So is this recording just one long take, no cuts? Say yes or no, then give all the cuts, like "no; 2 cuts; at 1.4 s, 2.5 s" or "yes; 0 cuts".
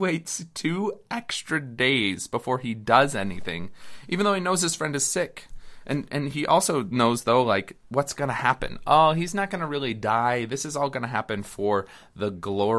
yes; 0 cuts